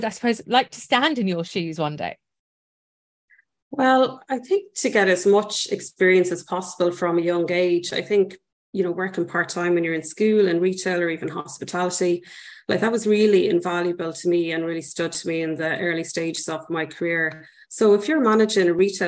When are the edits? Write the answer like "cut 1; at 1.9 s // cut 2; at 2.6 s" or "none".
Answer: cut 1; at 17.6 s